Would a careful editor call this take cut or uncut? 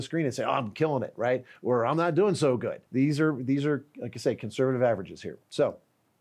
cut